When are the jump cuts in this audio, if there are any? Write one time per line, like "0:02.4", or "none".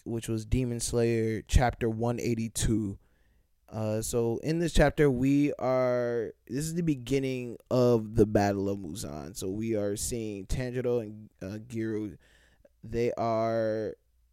none